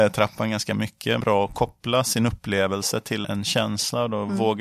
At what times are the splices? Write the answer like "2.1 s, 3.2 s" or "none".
1.2 s, 3.2 s